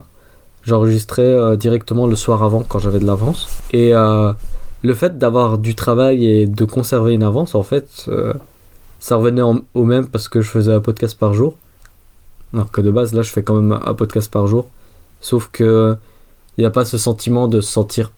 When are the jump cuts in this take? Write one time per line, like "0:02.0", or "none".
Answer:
none